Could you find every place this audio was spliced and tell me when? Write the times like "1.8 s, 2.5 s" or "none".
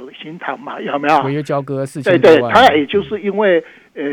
none

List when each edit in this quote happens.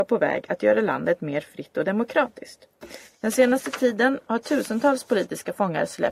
none

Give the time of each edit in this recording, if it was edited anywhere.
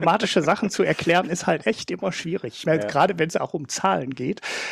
none

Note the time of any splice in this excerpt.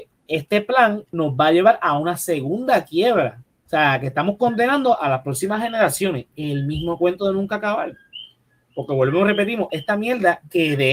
3.7 s, 9.7 s

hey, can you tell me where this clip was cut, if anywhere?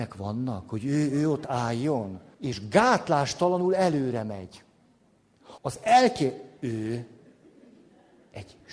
2.3 s, 5.6 s

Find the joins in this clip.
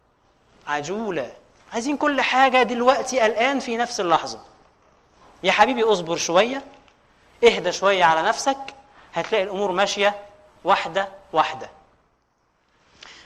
none

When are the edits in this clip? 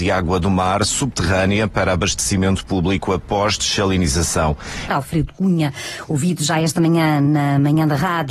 4.9 s

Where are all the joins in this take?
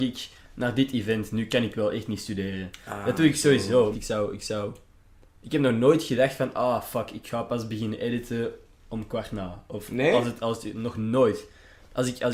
3.9 s

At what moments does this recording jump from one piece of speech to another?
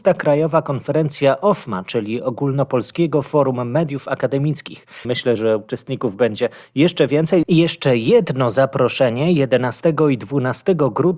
5.0 s, 7.4 s

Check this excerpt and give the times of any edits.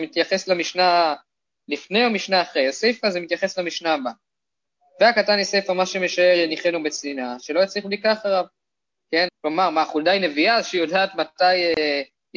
9.3 s

